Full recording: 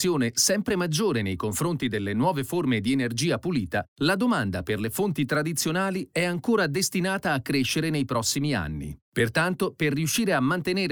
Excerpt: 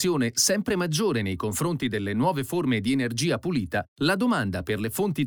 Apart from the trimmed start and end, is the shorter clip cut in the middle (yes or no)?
no